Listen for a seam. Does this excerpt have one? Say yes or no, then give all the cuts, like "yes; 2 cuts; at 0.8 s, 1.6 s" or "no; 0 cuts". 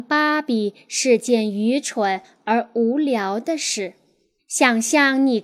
yes; 1 cut; at 4.4 s